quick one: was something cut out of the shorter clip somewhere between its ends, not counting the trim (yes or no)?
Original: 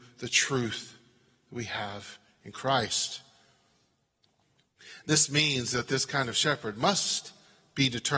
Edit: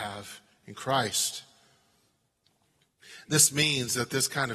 no